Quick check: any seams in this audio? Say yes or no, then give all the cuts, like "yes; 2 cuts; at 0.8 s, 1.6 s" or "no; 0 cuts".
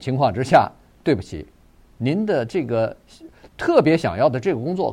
no; 0 cuts